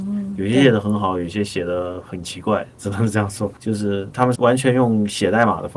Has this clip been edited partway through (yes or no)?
yes